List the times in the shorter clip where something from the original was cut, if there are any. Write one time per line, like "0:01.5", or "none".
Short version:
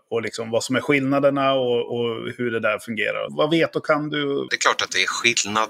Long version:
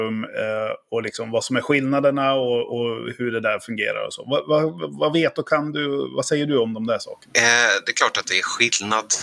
0:03.3
0:04.5